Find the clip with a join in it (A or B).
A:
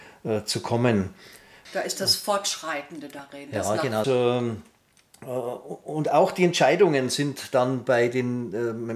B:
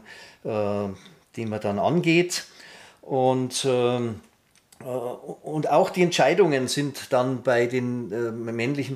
A